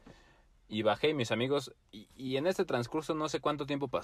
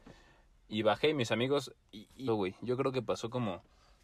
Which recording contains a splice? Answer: second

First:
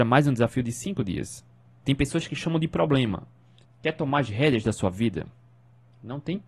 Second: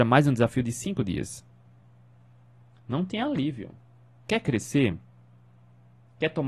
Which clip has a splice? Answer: first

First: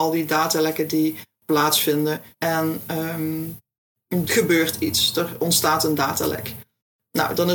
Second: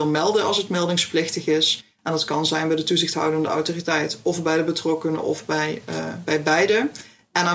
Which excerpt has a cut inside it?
first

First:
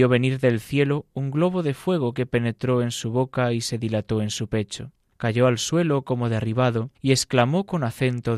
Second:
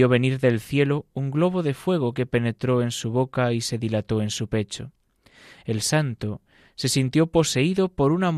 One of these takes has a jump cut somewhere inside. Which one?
first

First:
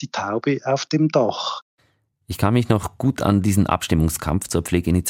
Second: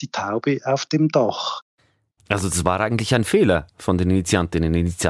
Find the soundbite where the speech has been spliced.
second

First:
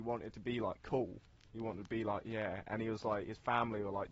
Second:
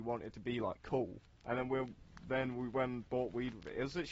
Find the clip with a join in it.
second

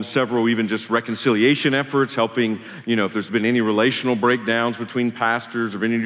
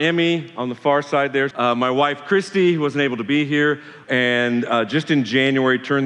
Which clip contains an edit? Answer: second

